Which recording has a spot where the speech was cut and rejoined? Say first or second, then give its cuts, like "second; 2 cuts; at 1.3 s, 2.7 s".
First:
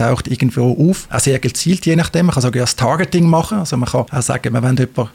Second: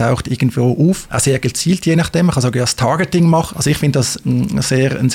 second; 1 cut; at 3.5 s